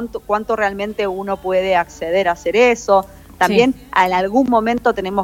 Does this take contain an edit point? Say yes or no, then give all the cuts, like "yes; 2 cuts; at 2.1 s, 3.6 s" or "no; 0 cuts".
no; 0 cuts